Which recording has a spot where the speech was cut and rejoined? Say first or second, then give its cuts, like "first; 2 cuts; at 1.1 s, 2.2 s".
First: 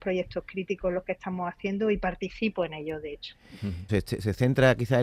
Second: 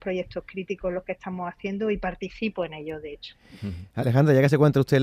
first; 1 cut; at 3.9 s